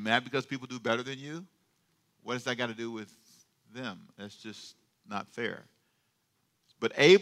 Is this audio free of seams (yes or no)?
yes